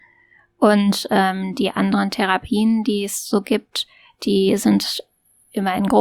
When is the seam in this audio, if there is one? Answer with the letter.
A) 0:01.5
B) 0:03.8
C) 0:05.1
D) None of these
D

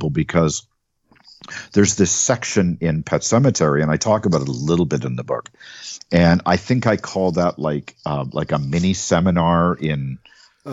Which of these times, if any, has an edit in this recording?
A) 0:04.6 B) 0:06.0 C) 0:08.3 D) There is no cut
B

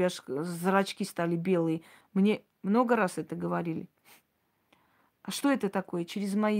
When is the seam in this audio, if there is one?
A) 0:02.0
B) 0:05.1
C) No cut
A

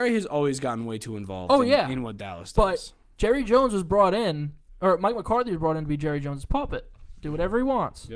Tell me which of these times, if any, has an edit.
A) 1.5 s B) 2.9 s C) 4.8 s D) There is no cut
D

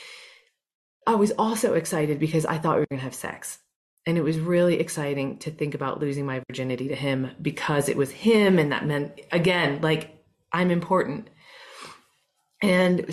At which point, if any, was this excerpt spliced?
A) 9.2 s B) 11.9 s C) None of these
C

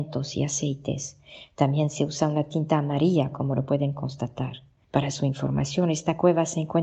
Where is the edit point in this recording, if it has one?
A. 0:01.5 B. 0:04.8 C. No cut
B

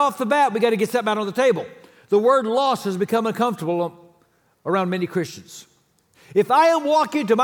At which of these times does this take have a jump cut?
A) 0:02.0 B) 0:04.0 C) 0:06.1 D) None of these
C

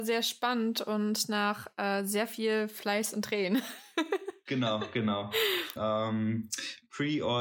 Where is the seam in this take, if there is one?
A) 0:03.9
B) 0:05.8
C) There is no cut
B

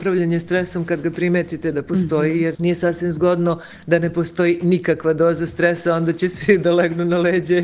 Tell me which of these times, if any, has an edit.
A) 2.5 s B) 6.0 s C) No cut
A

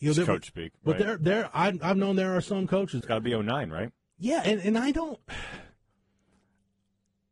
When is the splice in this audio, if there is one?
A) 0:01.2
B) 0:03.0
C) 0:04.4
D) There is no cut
B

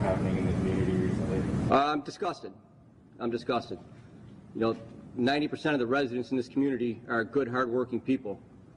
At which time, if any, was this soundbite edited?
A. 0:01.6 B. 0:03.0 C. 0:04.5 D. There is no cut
D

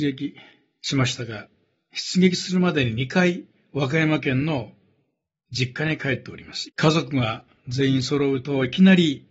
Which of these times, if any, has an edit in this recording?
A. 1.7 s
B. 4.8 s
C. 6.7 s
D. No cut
C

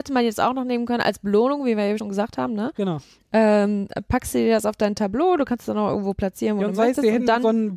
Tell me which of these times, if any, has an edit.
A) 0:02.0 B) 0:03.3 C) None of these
A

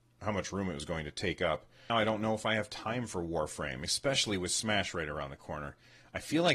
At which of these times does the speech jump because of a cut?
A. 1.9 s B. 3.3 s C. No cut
A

